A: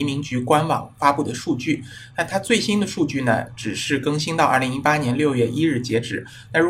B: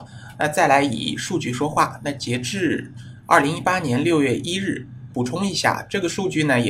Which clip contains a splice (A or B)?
B